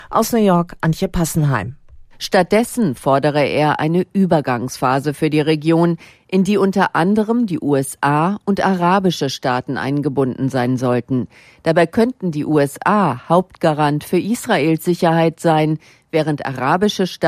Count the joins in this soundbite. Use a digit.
0